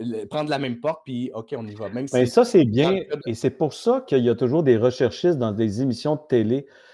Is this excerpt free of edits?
yes; 0 cuts

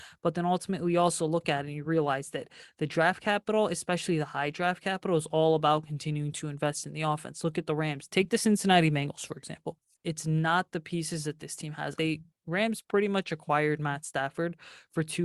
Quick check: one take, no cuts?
no; 3 cuts; at 8.1 s, 9.9 s, 12.0 s

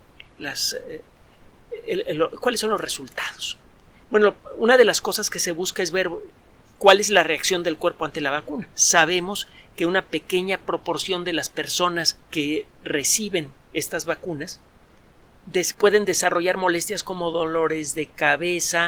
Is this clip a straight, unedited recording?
no; 2 cuts; at 12.2 s, 15.7 s

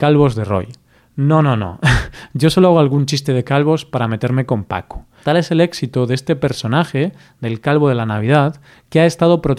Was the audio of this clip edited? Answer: yes; 1 cut; at 5.2 s

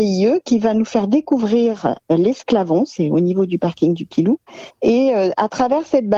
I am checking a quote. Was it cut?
no; 0 cuts

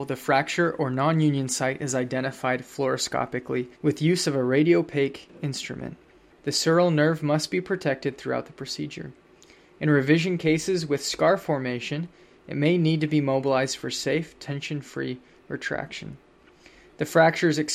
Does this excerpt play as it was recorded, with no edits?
no; 2 cuts; at 3.7 s, 6.3 s

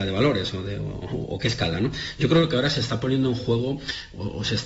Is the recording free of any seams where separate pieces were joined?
yes; 0 cuts

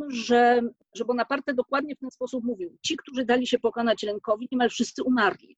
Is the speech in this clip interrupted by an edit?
no; 0 cuts

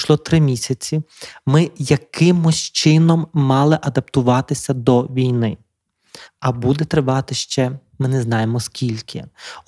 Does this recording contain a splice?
yes; 1 cut; at 6.3 s

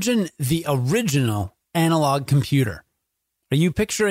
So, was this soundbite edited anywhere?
no; 0 cuts

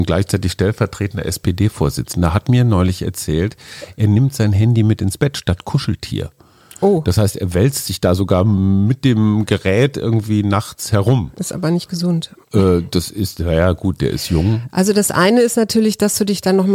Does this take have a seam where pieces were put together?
no; 0 cuts

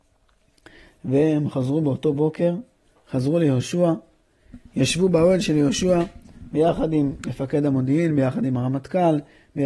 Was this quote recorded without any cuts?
yes; 0 cuts

